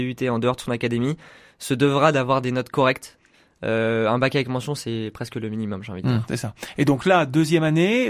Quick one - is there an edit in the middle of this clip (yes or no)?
no